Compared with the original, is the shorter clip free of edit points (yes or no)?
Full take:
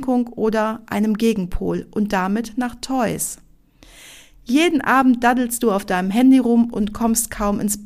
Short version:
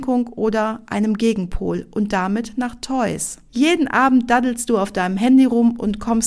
no